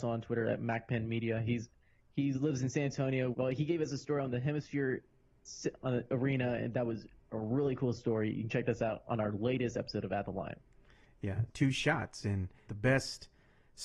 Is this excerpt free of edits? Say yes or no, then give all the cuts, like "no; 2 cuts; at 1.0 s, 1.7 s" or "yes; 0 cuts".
no; 3 cuts; at 3.3 s, 11.5 s, 12.7 s